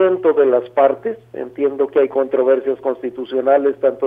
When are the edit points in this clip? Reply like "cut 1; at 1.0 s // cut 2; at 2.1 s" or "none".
none